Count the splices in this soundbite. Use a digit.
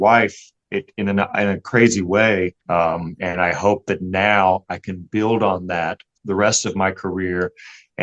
1